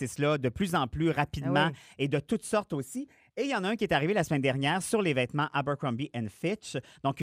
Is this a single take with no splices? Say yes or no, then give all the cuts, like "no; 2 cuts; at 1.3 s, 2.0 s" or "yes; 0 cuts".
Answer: yes; 0 cuts